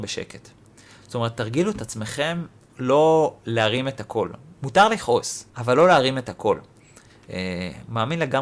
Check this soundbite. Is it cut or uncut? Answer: cut